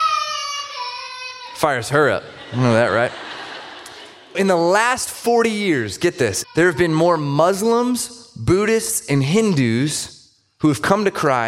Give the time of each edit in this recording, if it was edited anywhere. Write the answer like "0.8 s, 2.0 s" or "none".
4.3 s, 6.4 s